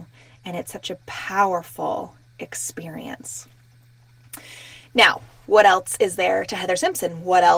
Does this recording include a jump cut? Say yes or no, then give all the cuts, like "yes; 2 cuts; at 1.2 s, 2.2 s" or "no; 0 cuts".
no; 0 cuts